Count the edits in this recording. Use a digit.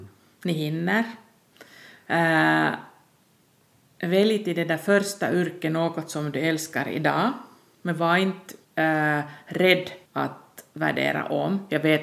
2